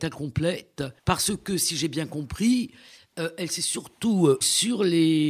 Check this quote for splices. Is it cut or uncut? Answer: cut